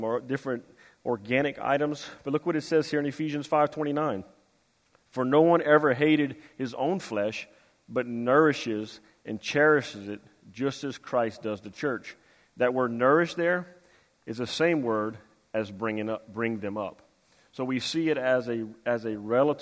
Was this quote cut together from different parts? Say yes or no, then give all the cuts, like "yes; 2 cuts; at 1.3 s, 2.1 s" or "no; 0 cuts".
no; 0 cuts